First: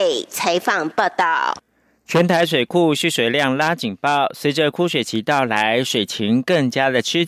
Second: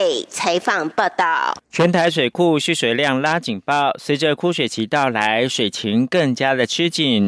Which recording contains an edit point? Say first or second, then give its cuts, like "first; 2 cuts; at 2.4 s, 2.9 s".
second; 1 cut; at 1.6 s